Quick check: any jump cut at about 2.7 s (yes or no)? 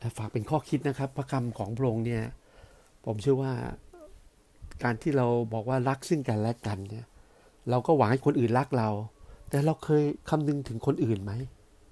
no